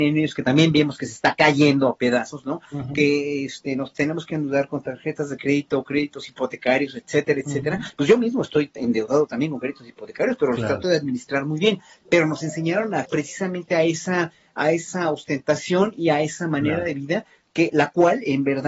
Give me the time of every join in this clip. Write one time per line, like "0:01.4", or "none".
none